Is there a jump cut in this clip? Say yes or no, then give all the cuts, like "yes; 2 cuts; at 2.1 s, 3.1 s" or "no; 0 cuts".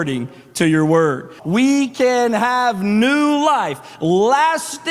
yes; 1 cut; at 1.4 s